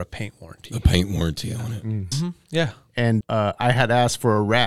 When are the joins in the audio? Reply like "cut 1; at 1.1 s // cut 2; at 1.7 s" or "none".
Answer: cut 1; at 2.1 s // cut 2; at 3.2 s